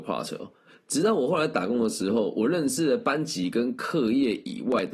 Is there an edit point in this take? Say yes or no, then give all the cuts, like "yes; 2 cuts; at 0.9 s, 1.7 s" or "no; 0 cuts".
no; 0 cuts